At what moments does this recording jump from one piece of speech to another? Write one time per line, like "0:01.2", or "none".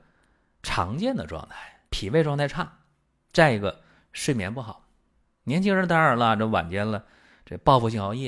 0:01.9